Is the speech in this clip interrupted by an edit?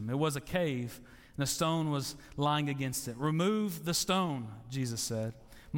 no; 0 cuts

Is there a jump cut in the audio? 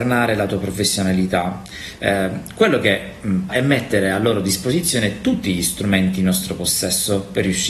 yes; 2 cuts; at 2.0 s, 3.5 s

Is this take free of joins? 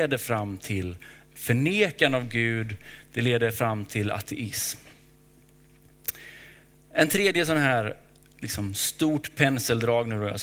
yes; 0 cuts

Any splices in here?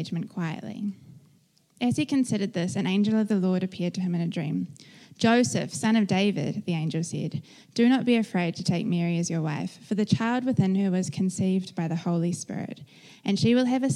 no; 0 cuts

